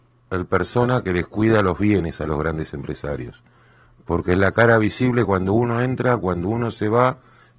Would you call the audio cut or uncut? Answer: uncut